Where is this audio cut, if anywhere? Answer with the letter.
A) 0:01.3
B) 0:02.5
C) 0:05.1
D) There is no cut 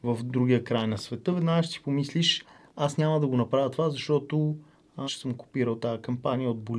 C